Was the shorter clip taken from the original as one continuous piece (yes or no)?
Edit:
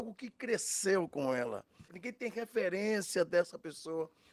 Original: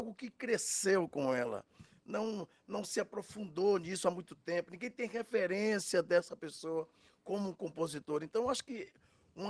no